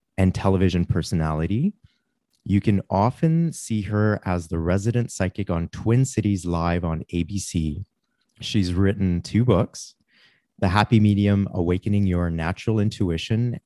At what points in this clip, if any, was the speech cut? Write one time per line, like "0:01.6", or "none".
0:08.2